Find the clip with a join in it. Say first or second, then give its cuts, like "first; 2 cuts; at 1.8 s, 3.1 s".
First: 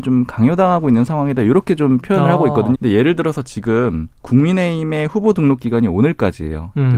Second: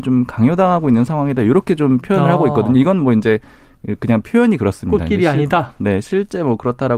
first; 2 cuts; at 2.7 s, 4.1 s